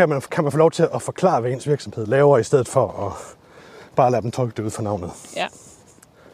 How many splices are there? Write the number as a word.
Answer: zero